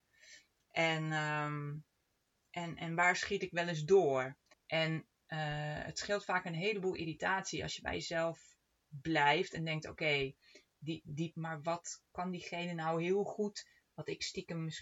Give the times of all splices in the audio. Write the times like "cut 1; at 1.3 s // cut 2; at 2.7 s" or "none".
cut 1; at 4.5 s // cut 2; at 11.3 s